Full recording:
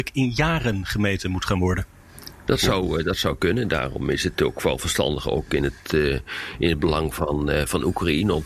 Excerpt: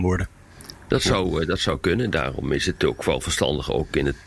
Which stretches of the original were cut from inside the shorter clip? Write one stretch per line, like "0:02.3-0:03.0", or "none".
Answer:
none